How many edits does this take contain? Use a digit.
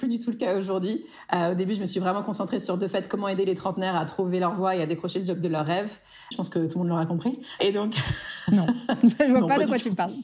1